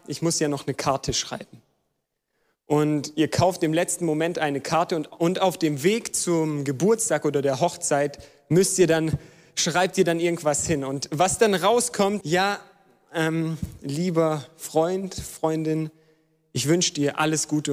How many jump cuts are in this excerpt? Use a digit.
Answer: 1